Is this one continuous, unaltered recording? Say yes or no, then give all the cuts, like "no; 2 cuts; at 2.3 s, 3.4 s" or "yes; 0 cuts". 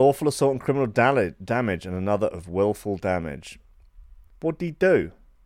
no; 1 cut; at 4.3 s